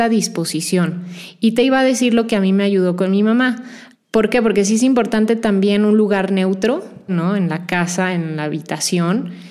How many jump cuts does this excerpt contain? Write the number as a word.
two